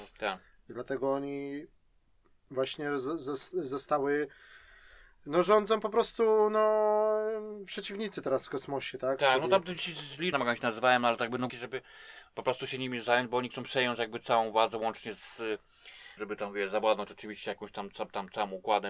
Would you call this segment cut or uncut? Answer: cut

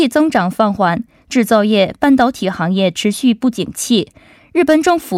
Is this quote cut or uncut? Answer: uncut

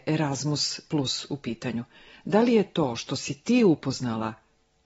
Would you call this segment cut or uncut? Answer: uncut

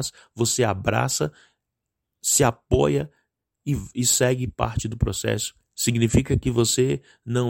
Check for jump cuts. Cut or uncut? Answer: cut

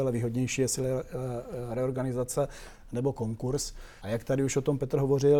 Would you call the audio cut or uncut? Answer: cut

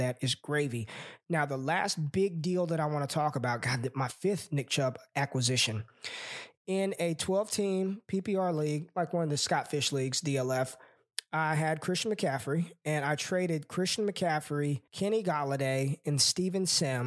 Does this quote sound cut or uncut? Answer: cut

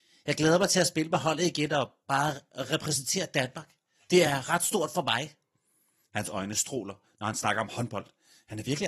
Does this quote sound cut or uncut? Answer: uncut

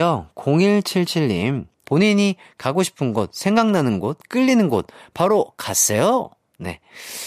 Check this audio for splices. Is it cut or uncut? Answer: cut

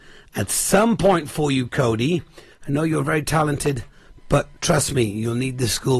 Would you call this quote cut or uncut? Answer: cut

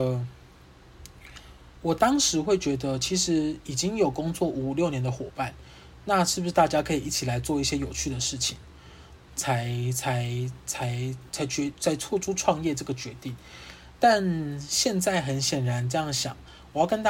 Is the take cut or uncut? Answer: cut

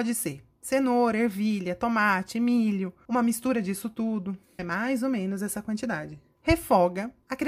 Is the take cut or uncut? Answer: cut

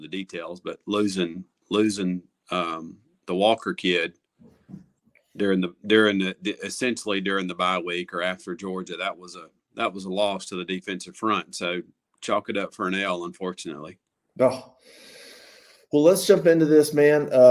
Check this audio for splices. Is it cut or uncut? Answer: uncut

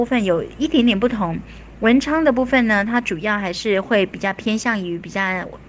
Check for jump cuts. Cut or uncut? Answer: uncut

